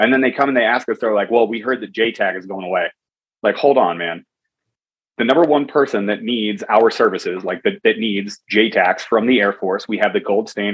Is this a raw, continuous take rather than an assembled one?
yes; 0 cuts

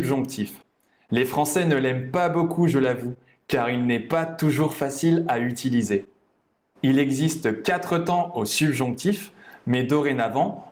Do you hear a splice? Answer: no; 0 cuts

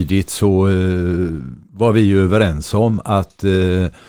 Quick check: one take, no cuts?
no; 1 cut; at 1.7 s

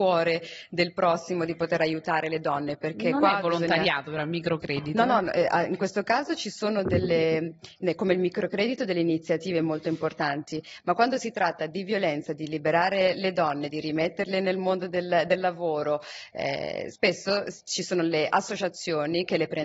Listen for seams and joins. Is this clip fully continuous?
yes; 0 cuts

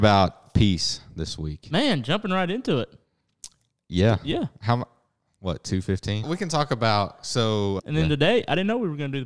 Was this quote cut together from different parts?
yes; 2 cuts; at 6.2 s, 7.8 s

